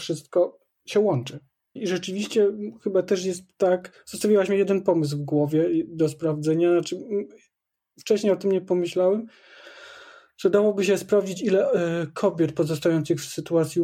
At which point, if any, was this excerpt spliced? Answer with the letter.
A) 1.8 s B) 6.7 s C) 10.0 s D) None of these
A